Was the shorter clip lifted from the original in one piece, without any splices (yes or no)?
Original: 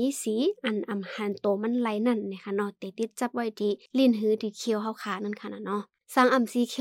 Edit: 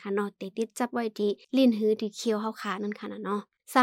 yes